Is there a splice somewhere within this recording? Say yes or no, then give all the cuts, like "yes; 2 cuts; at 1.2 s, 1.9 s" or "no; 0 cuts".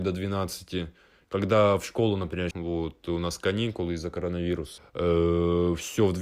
yes; 2 cuts; at 2.5 s, 4.8 s